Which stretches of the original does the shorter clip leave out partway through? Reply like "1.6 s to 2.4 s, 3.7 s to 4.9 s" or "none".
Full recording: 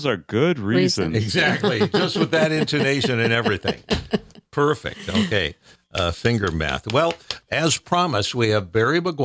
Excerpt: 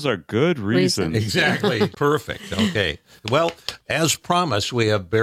1.9 s to 4.5 s, 5.8 s to 6.9 s